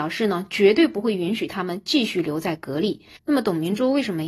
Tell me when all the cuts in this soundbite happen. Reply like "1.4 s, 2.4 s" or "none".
3.2 s